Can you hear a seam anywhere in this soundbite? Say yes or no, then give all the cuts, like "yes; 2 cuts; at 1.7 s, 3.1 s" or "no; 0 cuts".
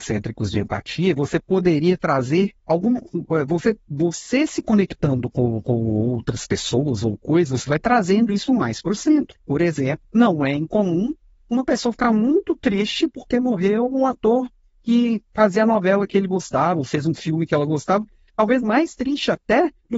no; 0 cuts